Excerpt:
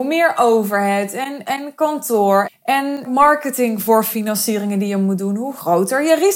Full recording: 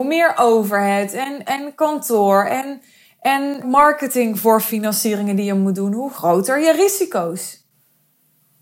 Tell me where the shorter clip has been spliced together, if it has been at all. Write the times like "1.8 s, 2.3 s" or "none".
2.4 s